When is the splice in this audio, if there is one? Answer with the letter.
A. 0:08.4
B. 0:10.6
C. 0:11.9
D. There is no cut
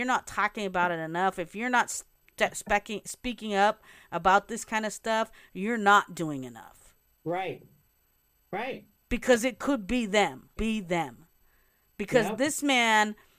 B